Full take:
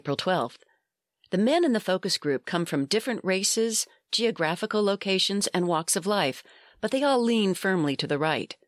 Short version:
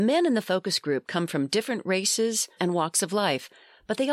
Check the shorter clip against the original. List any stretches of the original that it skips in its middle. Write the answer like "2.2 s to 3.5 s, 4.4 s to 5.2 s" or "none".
3.9 s to 5.5 s